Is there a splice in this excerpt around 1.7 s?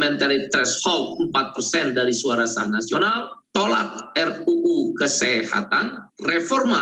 no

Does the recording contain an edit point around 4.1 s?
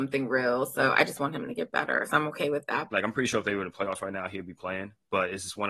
no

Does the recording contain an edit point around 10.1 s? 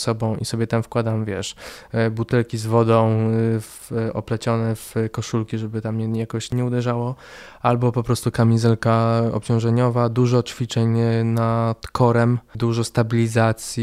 no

